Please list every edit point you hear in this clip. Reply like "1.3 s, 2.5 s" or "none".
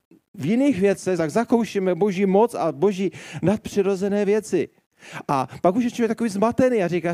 1.2 s